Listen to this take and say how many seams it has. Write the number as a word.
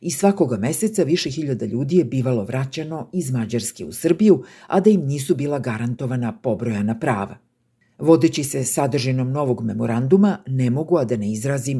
zero